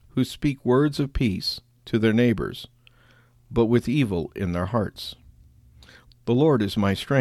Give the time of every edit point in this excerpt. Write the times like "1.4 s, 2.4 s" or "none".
6.1 s